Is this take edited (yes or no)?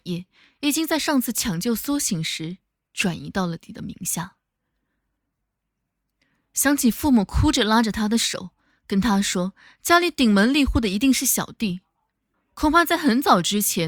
yes